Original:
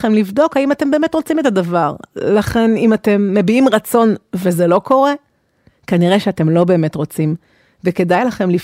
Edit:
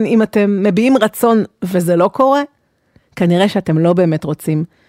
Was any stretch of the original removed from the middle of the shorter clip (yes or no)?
no